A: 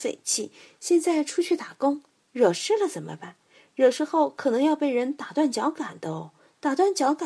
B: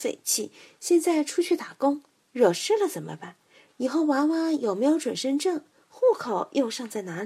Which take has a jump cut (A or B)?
B